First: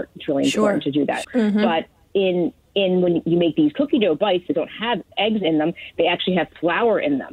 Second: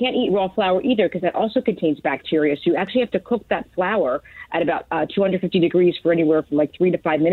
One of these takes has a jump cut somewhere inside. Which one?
first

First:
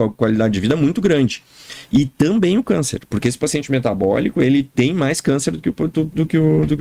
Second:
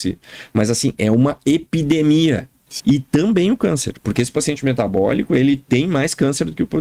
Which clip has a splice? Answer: second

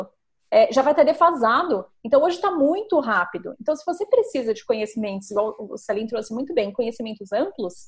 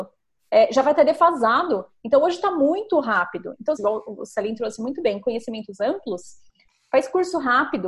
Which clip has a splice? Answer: second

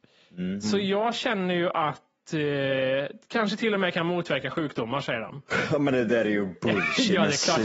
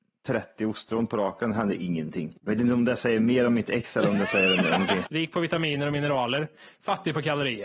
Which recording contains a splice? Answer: second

